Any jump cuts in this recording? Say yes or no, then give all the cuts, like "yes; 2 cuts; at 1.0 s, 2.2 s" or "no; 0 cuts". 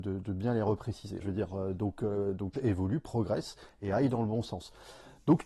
yes; 2 cuts; at 1.2 s, 2.5 s